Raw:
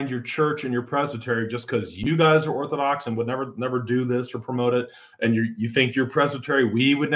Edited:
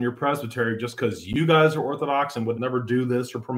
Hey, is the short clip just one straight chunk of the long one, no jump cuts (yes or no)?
no